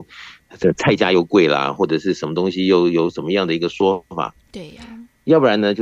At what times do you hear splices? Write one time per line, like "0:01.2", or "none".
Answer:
none